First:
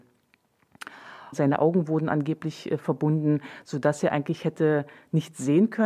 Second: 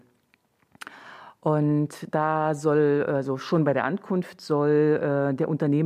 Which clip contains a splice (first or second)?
first